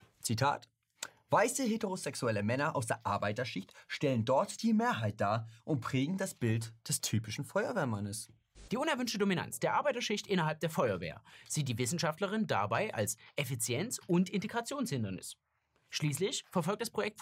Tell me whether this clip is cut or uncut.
cut